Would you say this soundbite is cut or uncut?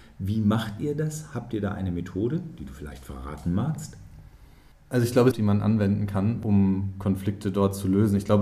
cut